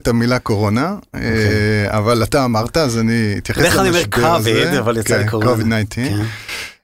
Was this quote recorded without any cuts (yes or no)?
yes